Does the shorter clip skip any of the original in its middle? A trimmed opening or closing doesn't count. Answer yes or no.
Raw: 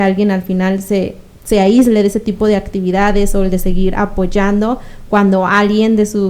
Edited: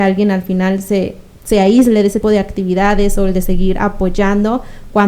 yes